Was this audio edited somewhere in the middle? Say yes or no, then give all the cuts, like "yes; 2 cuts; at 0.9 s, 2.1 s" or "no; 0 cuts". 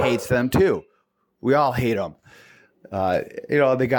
no; 0 cuts